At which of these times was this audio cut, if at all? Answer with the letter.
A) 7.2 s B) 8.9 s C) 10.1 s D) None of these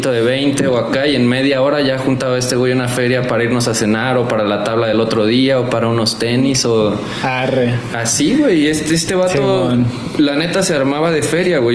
D